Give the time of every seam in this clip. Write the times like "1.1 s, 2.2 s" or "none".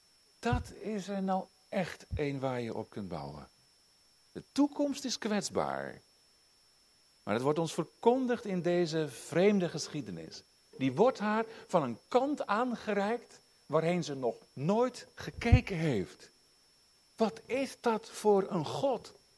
10.7 s

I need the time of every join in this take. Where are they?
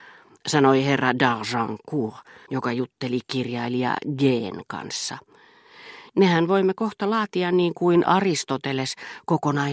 2.5 s, 6.1 s

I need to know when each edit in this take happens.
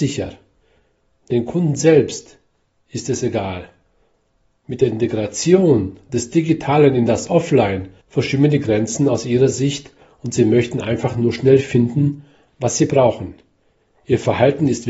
8.0 s

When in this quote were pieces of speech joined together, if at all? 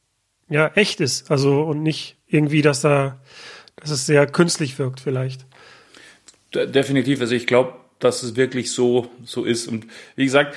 none

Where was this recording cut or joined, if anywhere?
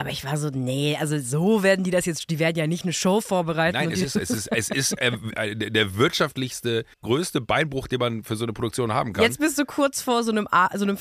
6.9 s

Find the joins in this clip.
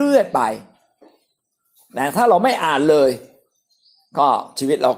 none

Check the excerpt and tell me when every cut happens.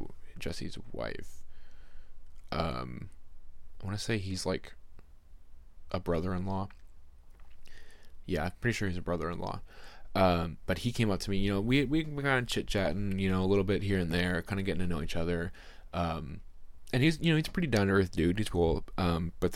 18.5 s

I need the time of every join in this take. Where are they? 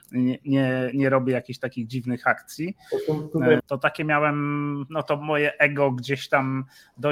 3.6 s

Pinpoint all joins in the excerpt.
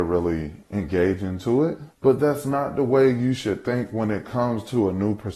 1.9 s

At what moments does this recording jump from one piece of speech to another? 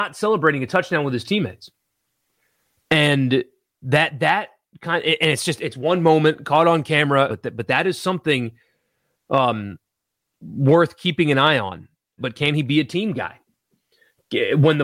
7.3 s, 12.2 s

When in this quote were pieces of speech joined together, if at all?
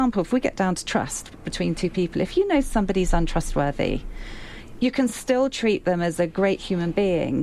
none

